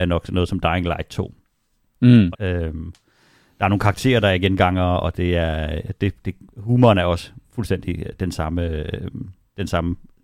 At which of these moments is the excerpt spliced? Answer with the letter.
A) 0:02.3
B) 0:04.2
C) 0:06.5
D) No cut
A